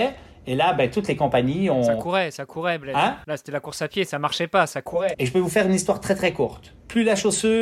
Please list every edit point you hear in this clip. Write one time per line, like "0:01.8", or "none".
0:05.1